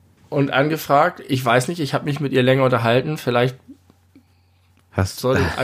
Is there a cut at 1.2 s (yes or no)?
no